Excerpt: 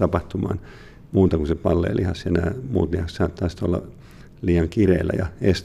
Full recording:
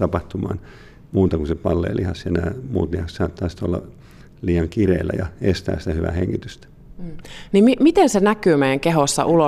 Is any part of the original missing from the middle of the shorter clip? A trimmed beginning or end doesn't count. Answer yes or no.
no